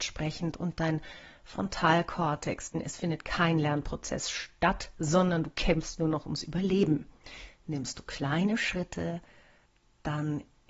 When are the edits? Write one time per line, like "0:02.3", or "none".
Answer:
0:02.7